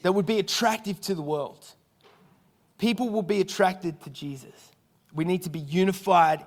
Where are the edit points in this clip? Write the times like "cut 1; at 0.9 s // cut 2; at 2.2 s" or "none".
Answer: none